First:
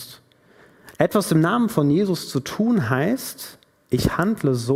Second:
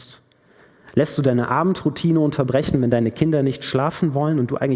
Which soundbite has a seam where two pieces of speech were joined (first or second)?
first